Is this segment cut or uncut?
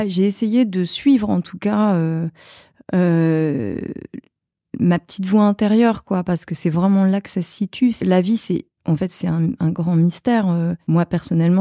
uncut